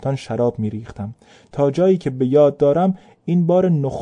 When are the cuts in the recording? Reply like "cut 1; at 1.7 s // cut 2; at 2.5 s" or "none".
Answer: none